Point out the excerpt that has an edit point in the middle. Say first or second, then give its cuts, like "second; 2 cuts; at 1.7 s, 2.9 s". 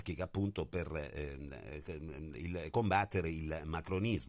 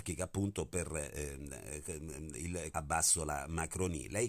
second; 1 cut; at 2.7 s